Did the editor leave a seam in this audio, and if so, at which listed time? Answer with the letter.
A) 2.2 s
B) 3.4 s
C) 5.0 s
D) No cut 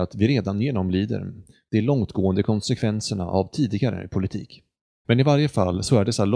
C